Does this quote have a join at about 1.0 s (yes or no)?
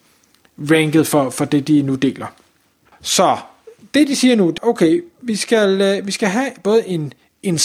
no